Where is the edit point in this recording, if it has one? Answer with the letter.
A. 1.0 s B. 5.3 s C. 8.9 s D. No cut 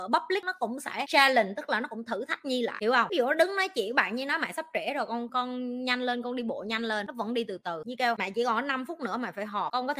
B